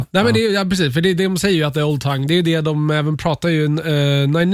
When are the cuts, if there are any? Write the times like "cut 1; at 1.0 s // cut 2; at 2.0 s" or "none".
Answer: none